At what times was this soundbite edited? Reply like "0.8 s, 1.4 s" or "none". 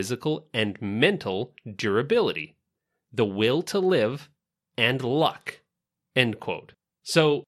none